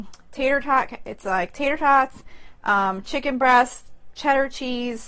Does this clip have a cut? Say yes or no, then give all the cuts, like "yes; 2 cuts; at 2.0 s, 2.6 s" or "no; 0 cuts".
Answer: no; 0 cuts